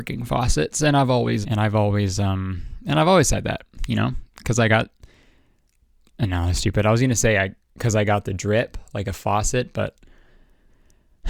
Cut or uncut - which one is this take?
cut